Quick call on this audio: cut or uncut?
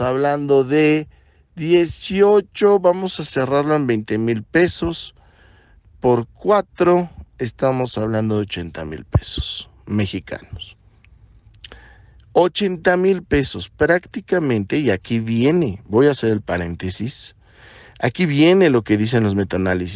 uncut